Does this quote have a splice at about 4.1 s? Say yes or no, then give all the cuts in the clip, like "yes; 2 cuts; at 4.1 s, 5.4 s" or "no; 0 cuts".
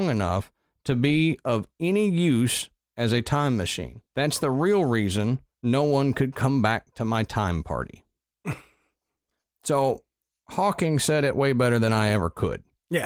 yes; 1 cut; at 4.1 s